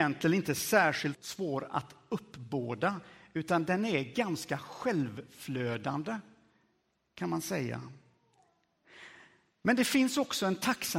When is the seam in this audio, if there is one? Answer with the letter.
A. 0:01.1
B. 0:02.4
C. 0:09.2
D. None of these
A